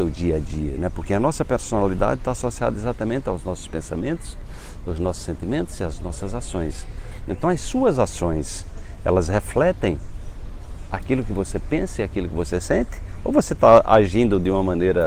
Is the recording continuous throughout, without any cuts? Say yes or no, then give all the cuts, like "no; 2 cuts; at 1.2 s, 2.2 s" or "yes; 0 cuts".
yes; 0 cuts